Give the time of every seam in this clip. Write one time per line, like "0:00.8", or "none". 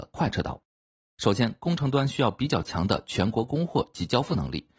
0:01.0

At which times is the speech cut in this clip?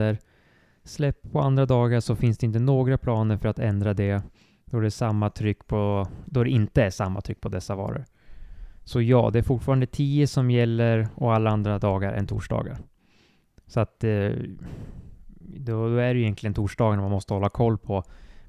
none

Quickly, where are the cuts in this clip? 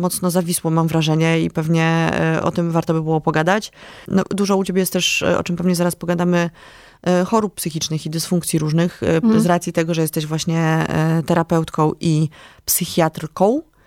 0:02.4
0:04.1

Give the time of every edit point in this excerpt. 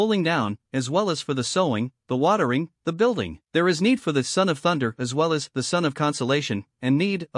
0:03.5

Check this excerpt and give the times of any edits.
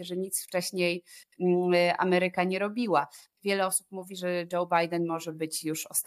0:03.3

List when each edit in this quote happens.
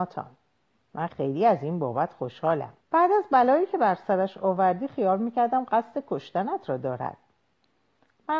0:01.1
0:02.8

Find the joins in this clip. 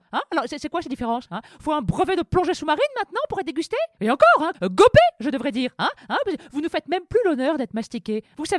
0:04.5

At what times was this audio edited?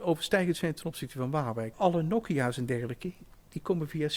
0:01.7

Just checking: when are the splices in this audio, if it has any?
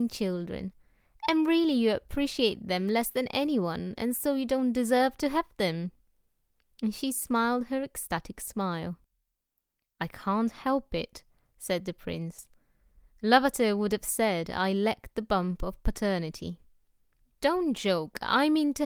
none

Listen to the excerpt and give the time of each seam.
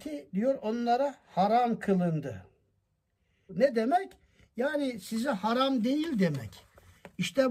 0:03.5

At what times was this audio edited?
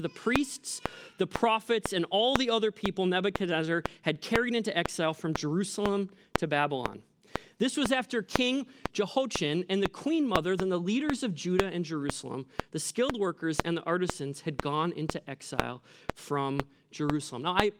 0:10.6

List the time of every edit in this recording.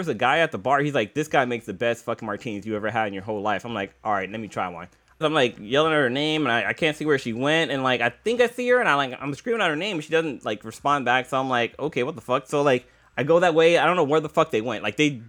0:05.2

